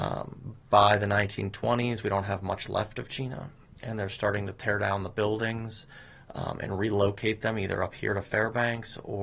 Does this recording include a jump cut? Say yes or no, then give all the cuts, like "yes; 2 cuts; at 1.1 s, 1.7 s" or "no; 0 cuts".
no; 0 cuts